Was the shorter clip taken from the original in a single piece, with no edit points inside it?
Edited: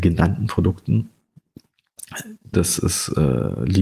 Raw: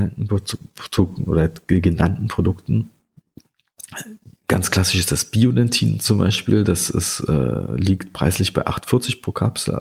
no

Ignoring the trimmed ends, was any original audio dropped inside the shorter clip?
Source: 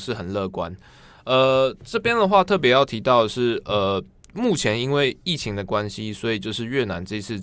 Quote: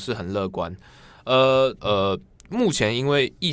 yes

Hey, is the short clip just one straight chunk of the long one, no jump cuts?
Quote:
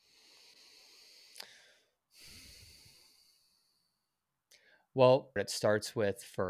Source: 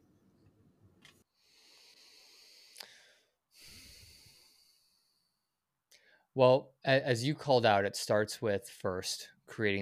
no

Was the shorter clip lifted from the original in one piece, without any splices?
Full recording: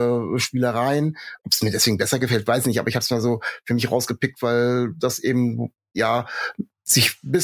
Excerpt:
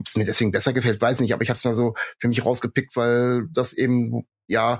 yes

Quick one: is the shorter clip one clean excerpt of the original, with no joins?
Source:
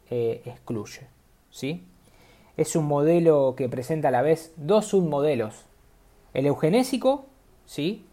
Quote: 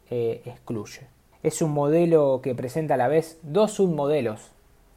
no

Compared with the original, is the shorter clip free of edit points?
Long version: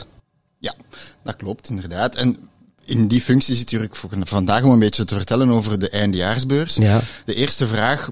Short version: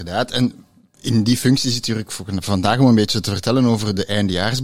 yes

